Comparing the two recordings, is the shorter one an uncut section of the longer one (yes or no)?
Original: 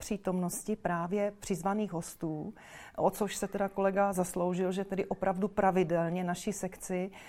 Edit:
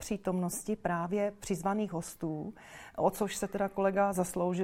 yes